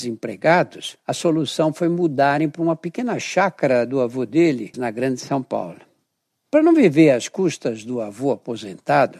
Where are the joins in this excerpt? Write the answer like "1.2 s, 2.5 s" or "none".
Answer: 4.7 s